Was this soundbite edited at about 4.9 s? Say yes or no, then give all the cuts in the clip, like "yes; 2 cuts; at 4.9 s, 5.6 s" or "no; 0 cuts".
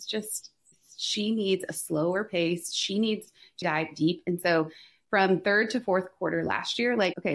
no; 1 cut; at 3.6 s